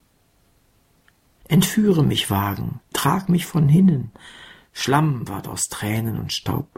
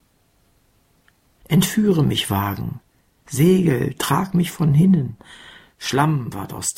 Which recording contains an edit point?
first; 1 cut; at 2.9 s

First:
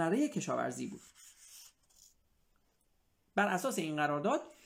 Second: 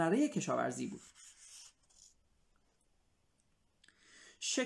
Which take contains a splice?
first; 1 cut; at 3.2 s

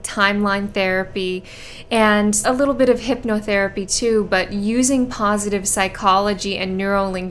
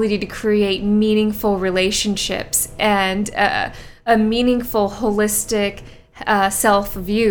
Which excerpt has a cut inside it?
first; 1 cut; at 2.4 s

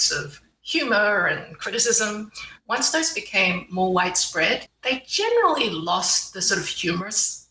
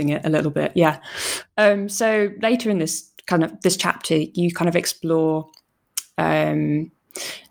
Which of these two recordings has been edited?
first; 1 cut; at 4.7 s

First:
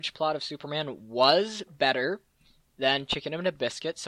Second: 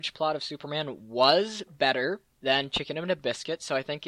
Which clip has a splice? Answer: second; 1 cut; at 2.3 s

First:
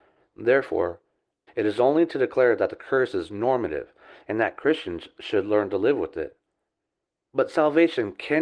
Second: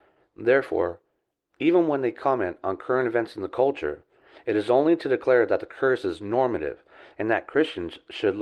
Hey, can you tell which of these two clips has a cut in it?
first; 1 cut; at 1.5 s

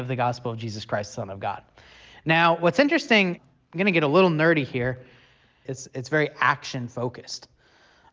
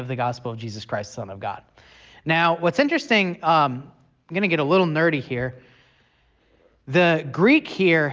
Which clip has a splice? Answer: first; 2 cuts; at 3.4 s, 5.7 s

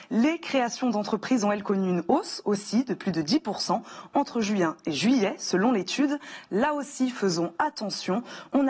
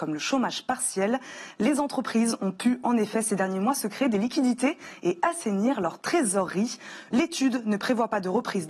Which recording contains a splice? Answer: second; 1 cut; at 7.1 s

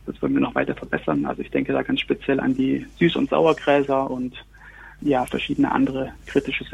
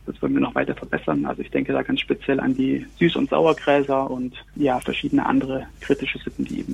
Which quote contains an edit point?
second; 1 cut; at 4.5 s

